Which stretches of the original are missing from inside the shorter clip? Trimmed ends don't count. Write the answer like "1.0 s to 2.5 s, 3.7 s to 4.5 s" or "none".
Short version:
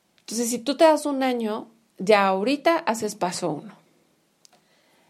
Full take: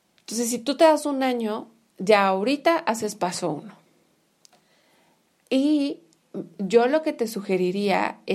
none